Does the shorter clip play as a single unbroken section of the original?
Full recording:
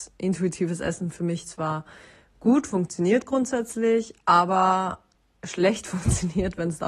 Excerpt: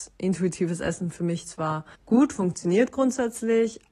no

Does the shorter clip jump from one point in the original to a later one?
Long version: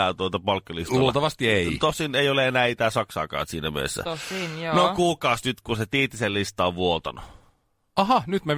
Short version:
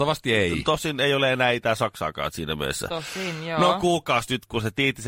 no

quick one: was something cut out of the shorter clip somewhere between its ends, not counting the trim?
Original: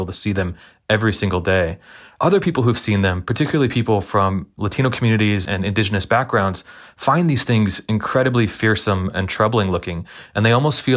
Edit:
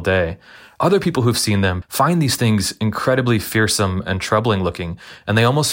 yes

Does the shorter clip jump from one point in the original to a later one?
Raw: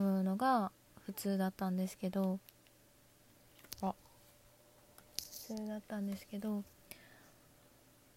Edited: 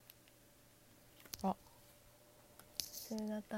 no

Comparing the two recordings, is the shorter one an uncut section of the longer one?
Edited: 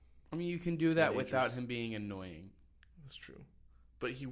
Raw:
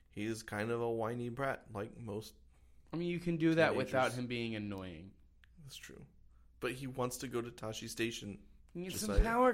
yes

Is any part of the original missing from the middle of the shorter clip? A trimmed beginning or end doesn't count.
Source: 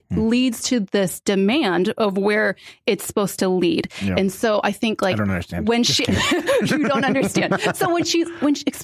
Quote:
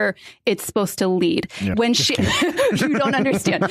yes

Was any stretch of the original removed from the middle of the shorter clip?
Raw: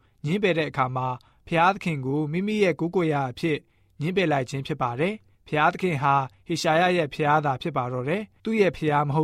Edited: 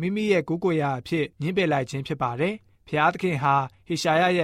yes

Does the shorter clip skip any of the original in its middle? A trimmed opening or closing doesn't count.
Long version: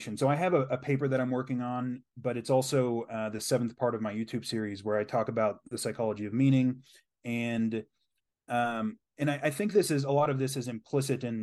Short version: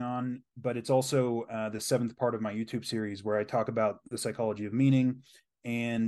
no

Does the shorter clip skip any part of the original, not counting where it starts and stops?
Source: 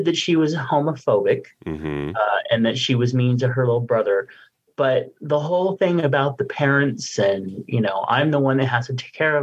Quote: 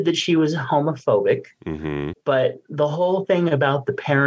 yes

